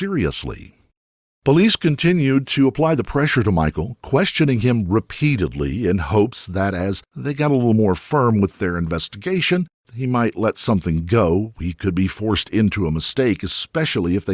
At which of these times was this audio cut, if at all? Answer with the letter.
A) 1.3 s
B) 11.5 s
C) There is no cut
C